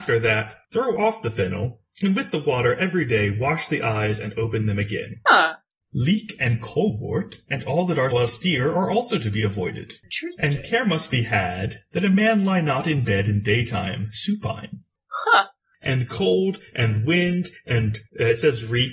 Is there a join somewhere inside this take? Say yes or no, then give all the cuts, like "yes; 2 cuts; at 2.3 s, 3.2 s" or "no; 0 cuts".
yes; 2 cuts; at 5.3 s, 8.1 s